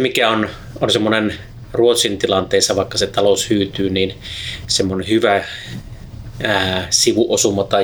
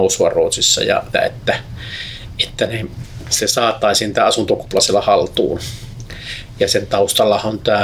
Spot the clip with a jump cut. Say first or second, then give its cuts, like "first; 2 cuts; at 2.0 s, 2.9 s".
second; 1 cut; at 1.1 s